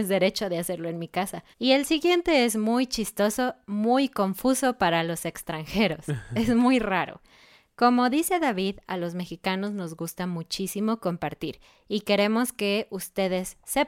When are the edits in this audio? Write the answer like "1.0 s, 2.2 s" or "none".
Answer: 1.5 s